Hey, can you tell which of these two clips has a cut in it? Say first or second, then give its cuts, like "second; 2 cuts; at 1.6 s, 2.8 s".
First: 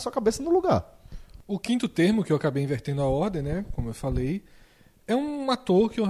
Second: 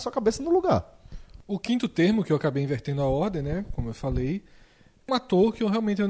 second; 1 cut; at 5.1 s